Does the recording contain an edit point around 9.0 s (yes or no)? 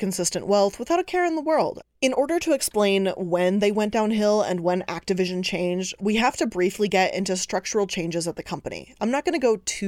no